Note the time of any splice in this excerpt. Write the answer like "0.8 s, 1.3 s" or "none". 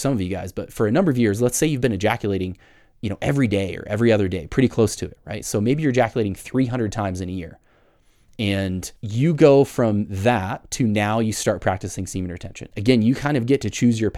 9.0 s, 12.7 s

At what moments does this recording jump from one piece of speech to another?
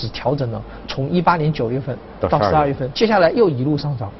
2.9 s

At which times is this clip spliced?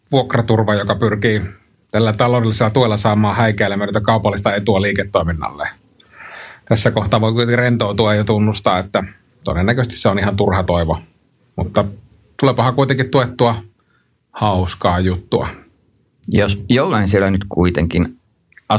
none

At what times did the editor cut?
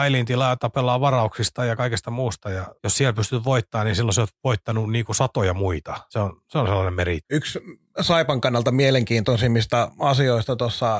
none

